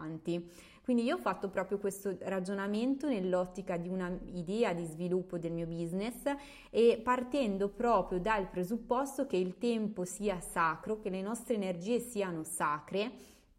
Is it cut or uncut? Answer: uncut